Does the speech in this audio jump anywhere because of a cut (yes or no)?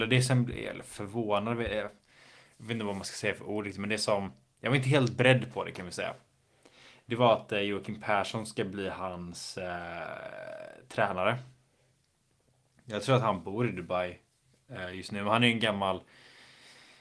no